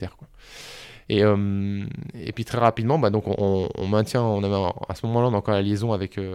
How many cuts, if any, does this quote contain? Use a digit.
0